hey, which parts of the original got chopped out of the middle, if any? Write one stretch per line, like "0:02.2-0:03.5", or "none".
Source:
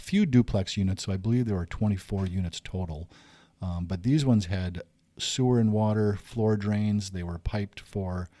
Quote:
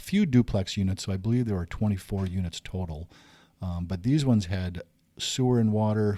none